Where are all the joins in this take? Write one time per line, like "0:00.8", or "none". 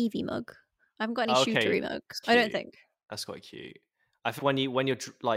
0:02.2
0:04.4